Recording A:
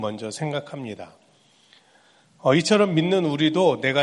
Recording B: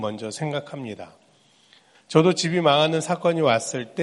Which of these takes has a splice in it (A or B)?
B